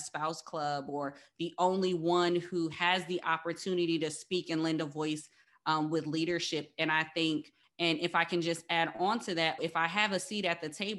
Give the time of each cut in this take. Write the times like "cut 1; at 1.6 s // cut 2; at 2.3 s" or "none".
cut 1; at 7.6 s // cut 2; at 9.6 s